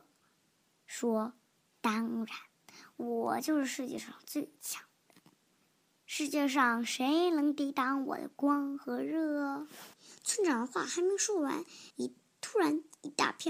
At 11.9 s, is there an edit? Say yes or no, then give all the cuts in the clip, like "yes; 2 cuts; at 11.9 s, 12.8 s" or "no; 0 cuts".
yes; 2 cuts; at 9.9 s, 11.9 s